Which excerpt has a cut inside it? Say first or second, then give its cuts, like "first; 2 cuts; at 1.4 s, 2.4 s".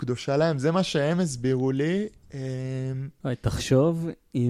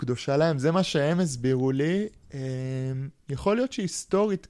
first; 1 cut; at 3.2 s